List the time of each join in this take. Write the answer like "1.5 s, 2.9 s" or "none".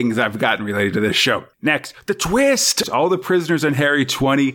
1.5 s, 2.8 s